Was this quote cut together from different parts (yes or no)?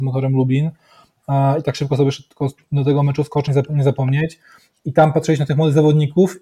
yes